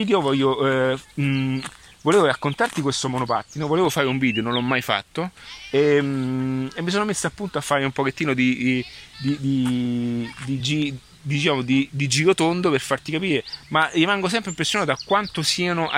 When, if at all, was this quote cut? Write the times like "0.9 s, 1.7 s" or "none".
none

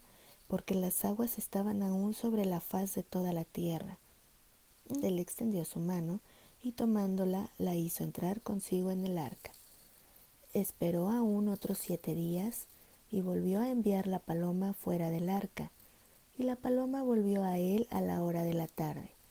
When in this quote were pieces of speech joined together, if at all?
5.0 s

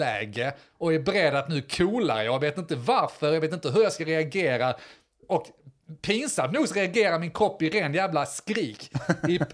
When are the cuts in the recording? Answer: none

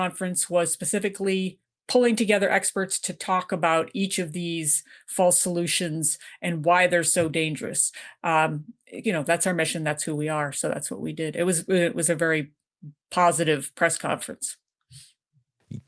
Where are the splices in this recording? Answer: 9.0 s

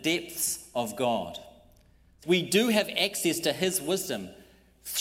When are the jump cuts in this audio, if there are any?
2.2 s

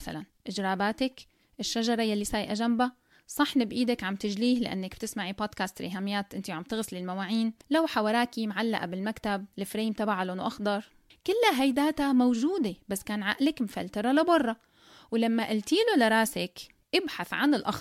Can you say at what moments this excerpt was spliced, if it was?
7.6 s

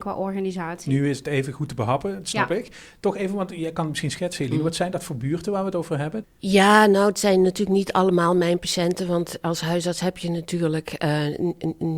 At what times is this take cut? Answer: 6.2 s

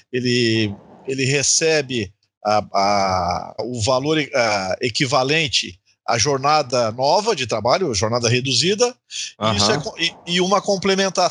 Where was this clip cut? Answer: 3.6 s

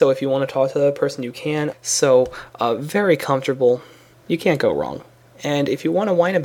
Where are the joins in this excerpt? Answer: 1.7 s, 4.1 s

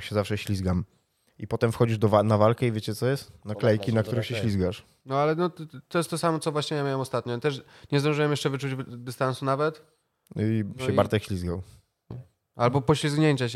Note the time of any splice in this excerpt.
12.1 s

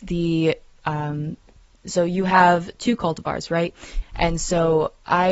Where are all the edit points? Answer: 4.0 s

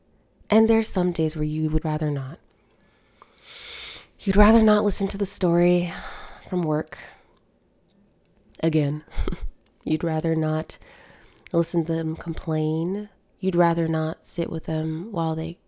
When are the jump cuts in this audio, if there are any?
1.8 s

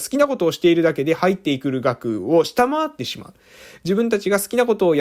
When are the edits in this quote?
none

